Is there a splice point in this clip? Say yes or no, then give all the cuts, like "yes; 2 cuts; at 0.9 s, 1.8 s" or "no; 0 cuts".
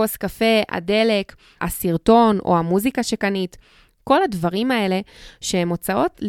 yes; 1 cut; at 1.6 s